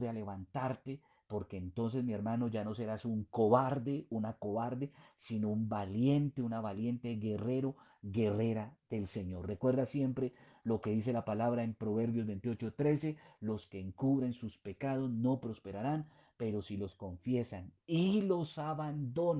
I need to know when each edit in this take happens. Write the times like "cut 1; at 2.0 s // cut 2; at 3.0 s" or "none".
none